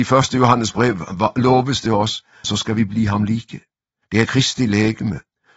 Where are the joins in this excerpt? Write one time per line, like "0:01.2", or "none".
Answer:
0:02.4
0:04.0